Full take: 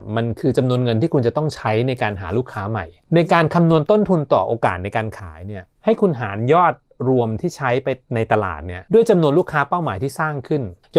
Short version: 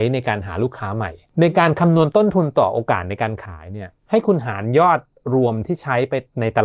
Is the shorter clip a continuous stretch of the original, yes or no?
yes